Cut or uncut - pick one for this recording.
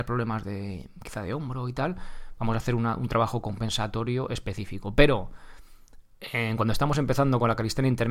uncut